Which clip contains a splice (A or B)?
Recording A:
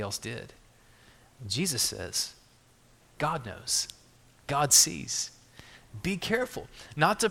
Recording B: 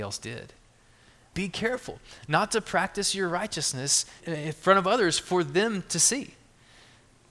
B